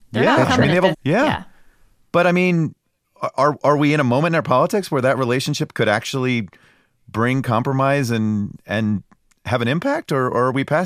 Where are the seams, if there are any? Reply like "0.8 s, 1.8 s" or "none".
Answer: 0.9 s